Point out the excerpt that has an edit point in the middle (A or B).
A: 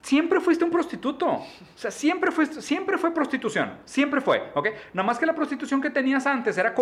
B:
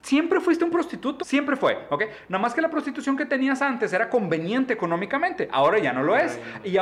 B